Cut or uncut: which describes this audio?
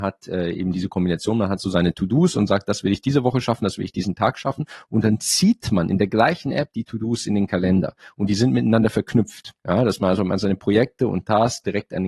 cut